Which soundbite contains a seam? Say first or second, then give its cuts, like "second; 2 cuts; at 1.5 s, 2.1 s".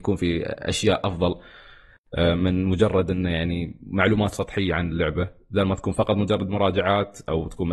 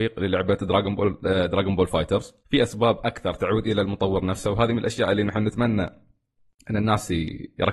second; 1 cut; at 2.4 s